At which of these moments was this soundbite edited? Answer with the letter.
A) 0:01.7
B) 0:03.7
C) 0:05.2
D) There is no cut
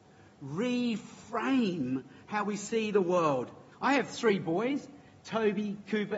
B